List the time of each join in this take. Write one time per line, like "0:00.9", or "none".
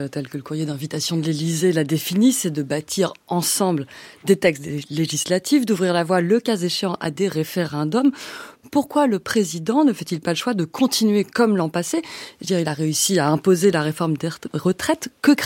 none